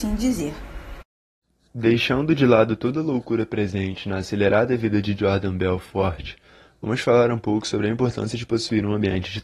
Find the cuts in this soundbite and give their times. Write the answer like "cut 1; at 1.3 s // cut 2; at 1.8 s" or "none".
none